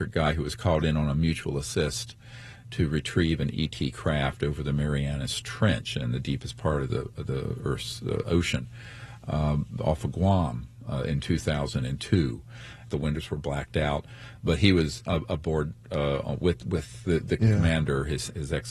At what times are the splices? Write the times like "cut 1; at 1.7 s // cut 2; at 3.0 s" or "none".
cut 1; at 12.9 s // cut 2; at 17.4 s

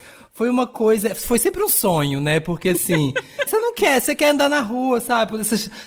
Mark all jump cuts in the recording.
cut 1; at 3.5 s

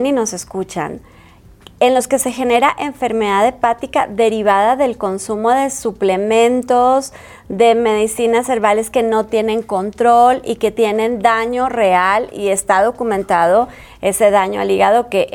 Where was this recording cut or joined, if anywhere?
none

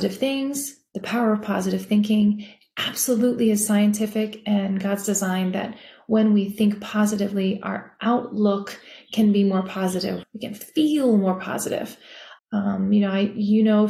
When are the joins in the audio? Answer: cut 1; at 10.2 s // cut 2; at 12.4 s

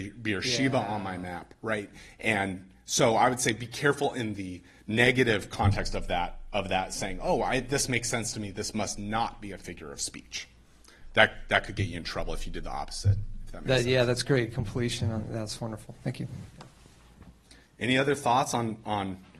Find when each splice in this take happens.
none

